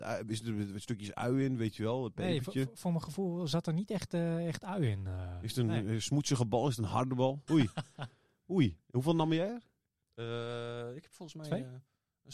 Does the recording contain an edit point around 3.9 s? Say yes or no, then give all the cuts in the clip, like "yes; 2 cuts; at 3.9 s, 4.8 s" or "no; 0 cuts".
no; 1 cut; at 7.5 s